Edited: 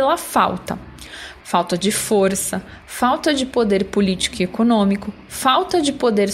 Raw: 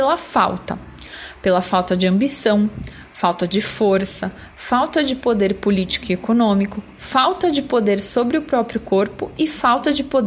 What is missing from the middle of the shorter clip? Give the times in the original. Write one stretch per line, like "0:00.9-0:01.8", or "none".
0:01.4-0:03.1